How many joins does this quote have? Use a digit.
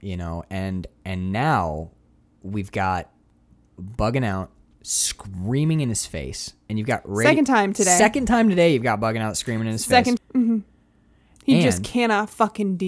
1